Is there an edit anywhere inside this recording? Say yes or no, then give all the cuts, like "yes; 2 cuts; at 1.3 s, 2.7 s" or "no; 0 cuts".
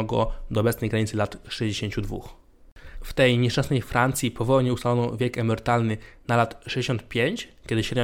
yes; 1 cut; at 2.9 s